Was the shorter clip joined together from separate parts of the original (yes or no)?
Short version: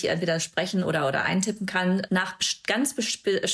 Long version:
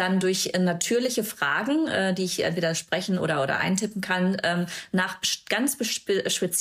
yes